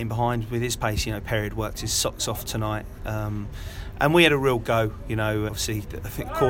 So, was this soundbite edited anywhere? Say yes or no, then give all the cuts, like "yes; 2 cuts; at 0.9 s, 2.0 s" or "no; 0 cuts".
yes; 1 cut; at 5.5 s